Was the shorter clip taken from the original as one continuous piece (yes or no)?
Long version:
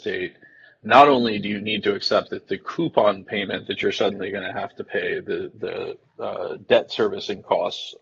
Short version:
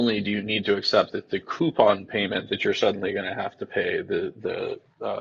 yes